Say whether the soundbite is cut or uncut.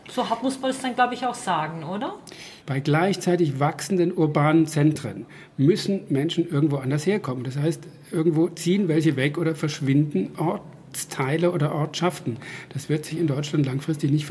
cut